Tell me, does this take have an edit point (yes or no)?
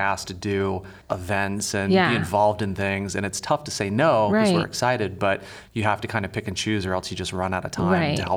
yes